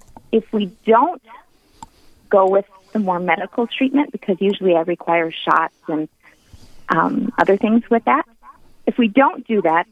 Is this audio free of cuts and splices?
yes; 0 cuts

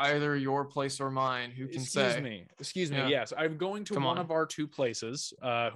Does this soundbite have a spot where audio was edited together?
no; 0 cuts

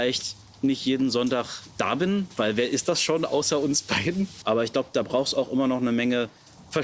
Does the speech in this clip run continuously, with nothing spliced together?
no; 1 cut; at 4.4 s

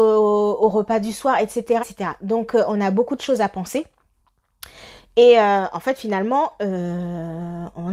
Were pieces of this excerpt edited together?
yes; 1 cut; at 1.8 s

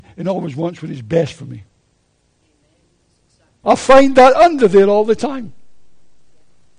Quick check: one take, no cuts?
no; 1 cut; at 3.6 s

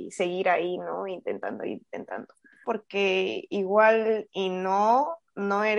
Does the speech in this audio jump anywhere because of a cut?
yes; 1 cut; at 2.6 s

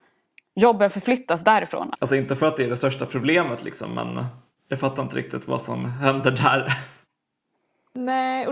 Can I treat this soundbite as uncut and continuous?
no; 1 cut; at 1.9 s

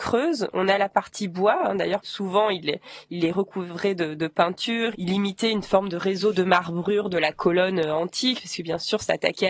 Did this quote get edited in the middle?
yes; 2 cuts; at 2.0 s, 4.9 s

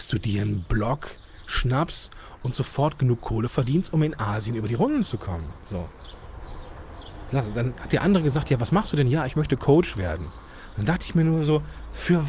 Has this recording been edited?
no; 0 cuts

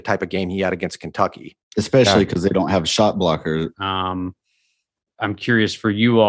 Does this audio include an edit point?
yes; 2 cuts; at 1.7 s, 3.7 s

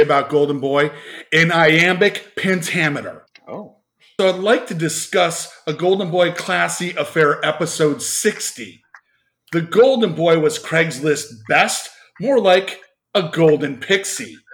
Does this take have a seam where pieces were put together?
yes; 1 cut; at 4.2 s

